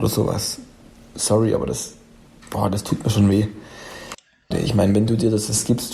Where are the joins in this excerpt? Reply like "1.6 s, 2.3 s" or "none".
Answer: 4.5 s

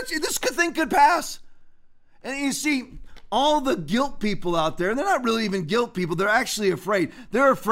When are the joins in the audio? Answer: none

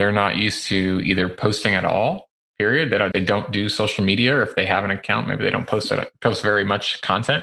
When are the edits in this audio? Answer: 3.1 s

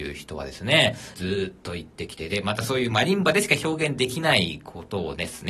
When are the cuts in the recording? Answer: 1.1 s

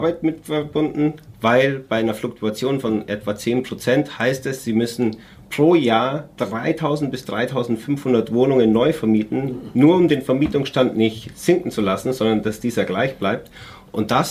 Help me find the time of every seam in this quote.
none

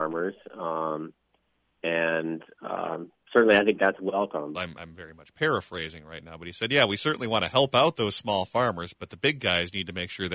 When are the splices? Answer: 4.5 s

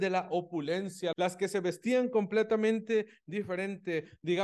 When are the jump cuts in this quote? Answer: 1.1 s

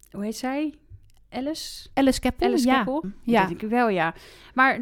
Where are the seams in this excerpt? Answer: 3.0 s

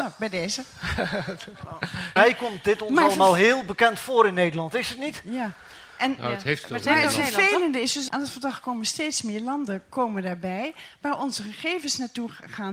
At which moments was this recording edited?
2.2 s, 8.1 s

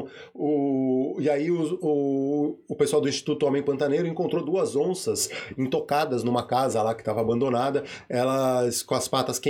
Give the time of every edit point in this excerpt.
none

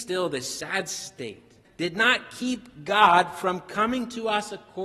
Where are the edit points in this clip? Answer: 1.6 s

